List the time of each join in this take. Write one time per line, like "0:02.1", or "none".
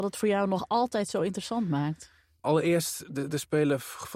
none